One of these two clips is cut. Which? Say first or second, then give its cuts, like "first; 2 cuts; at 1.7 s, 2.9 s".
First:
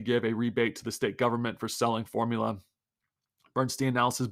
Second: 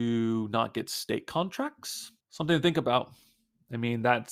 second; 1 cut; at 2.2 s